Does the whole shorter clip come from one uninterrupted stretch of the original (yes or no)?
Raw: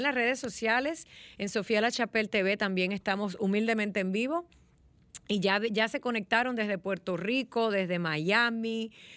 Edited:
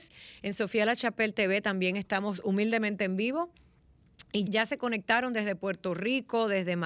no